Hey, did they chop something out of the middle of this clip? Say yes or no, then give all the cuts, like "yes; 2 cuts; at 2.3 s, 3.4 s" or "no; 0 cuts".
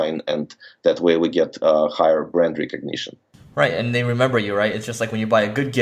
no; 0 cuts